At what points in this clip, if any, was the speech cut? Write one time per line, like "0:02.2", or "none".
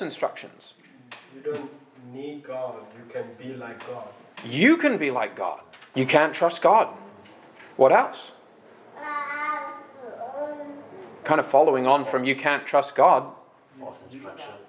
0:05.9
0:07.7